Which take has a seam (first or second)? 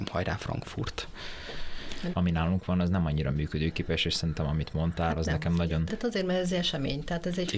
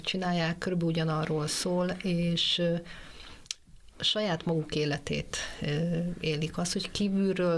first